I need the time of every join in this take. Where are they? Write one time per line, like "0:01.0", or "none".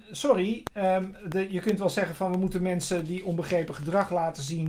none